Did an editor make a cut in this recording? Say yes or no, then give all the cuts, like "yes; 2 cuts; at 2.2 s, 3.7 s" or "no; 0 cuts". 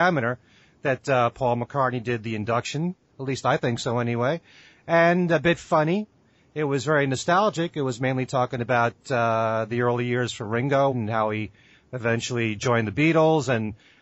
yes; 2 cuts; at 3.1 s, 10.9 s